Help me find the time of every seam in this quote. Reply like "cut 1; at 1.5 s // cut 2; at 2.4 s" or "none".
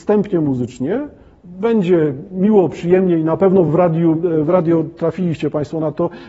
none